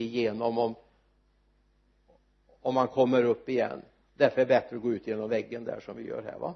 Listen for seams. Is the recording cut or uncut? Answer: uncut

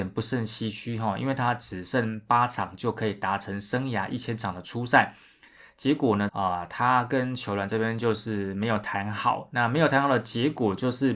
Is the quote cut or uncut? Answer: cut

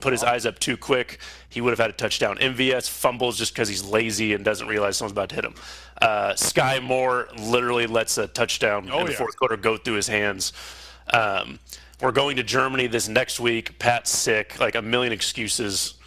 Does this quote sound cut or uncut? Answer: uncut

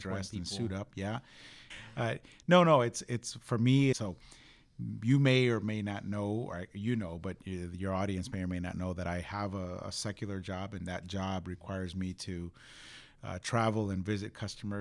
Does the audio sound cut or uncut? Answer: cut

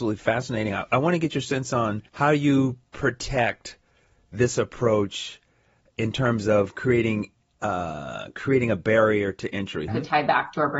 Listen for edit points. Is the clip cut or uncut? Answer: cut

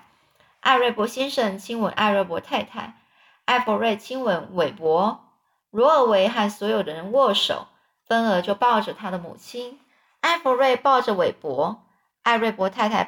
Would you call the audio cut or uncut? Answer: uncut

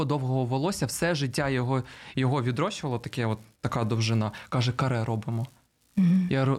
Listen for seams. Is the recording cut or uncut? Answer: uncut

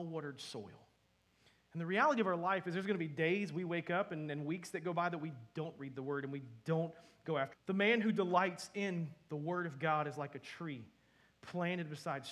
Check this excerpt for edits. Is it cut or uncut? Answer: cut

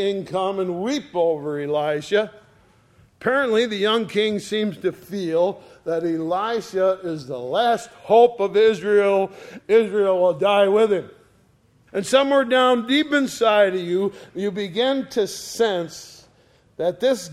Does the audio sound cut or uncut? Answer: cut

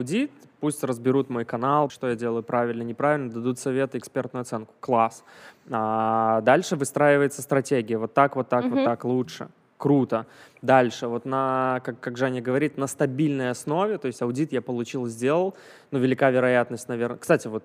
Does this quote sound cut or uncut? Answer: cut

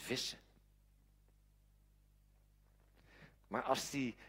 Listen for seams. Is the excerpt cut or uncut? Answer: cut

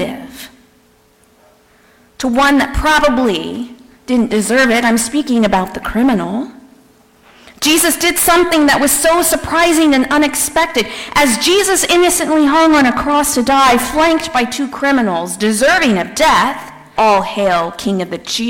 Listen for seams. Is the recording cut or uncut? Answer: cut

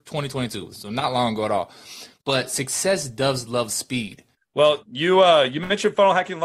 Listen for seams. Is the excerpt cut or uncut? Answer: cut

